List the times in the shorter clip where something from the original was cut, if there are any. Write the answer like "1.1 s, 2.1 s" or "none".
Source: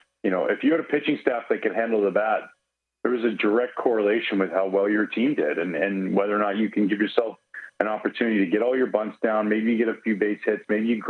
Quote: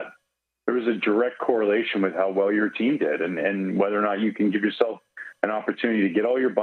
none